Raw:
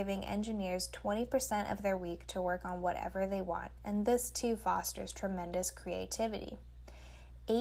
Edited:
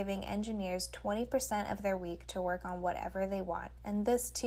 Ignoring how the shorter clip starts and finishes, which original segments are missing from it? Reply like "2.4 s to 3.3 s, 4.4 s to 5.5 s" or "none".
none